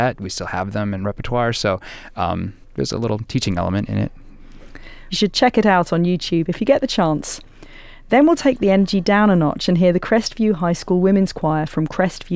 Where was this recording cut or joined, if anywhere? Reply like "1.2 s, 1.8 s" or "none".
2.6 s, 5.1 s